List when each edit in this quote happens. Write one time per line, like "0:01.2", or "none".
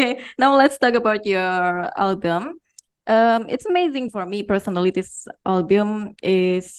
0:04.1